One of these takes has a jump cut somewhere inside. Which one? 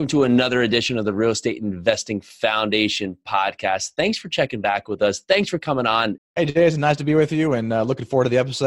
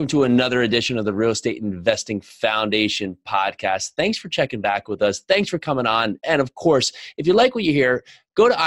first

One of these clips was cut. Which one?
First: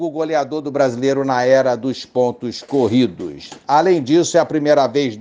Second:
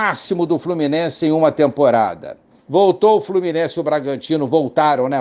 second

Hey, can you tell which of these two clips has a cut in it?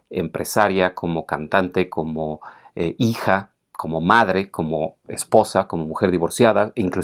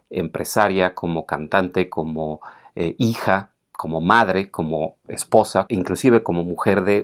second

